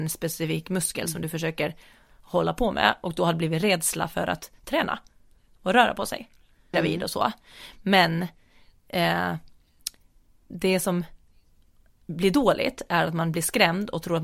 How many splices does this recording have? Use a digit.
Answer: 1